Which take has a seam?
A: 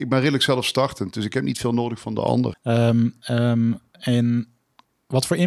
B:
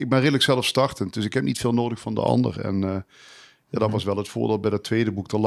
A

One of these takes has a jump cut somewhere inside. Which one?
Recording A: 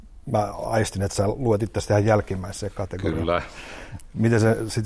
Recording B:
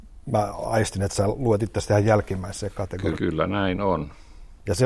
B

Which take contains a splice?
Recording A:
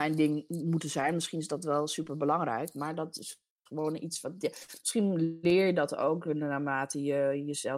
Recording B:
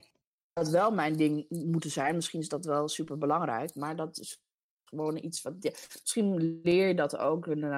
A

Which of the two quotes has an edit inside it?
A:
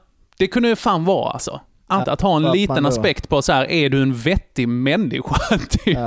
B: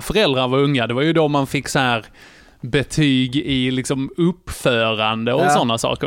A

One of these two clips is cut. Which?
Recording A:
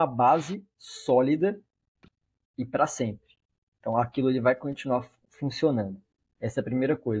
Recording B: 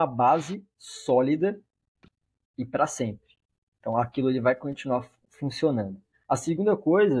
B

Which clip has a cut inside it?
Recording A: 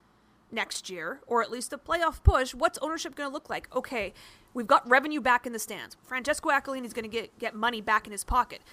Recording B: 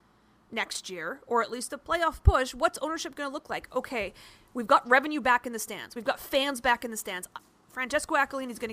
A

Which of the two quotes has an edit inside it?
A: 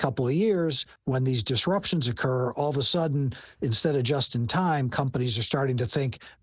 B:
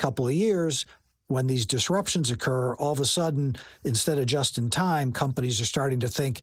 A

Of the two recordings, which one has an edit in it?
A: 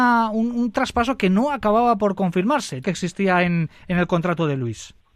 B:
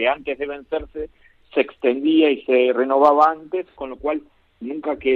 A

